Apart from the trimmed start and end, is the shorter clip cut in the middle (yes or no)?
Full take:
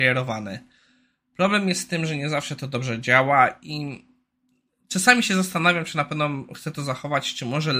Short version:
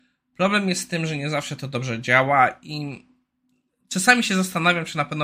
no